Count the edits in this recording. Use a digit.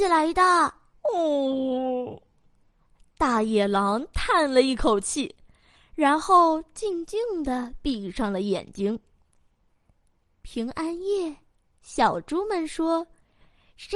1